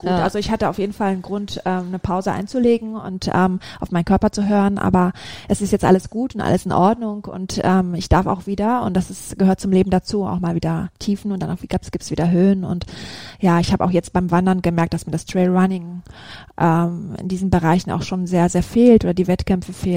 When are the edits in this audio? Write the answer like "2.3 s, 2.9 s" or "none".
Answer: none